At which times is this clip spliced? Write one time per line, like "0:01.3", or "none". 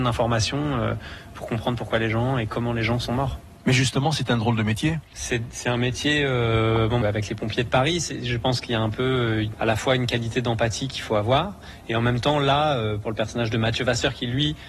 0:05.1
0:07.0
0:09.5